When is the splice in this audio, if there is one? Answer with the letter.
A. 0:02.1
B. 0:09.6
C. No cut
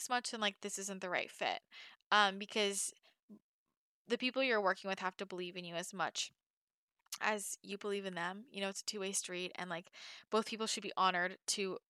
C